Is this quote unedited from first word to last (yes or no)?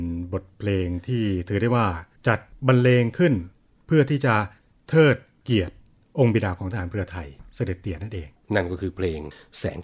yes